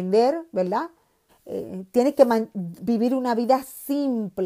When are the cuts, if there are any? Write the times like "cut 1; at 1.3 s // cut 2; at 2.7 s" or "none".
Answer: cut 1; at 1.3 s